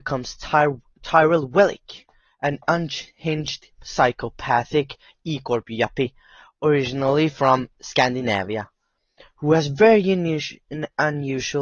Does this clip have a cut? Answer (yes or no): no